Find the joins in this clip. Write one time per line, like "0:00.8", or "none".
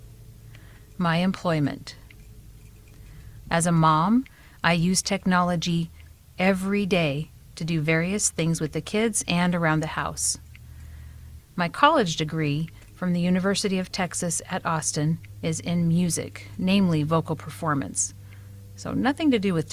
0:03.4
0:11.4